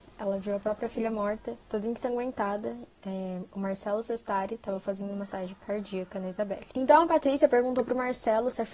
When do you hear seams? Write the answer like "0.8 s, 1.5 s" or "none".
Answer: 1.6 s, 2.9 s, 6.7 s